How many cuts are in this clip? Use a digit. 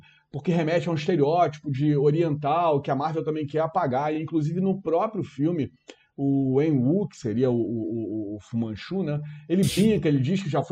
0